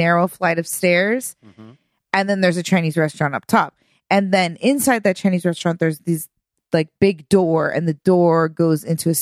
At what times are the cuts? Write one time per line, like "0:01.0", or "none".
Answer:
none